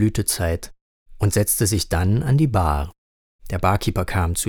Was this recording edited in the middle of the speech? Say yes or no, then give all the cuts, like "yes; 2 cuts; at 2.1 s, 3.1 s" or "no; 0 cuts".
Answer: no; 0 cuts